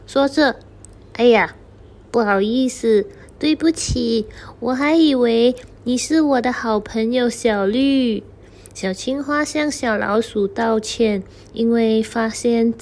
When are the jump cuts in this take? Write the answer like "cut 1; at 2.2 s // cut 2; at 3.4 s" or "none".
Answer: none